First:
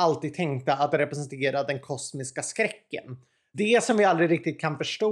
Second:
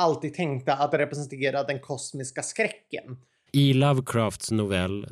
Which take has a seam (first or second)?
second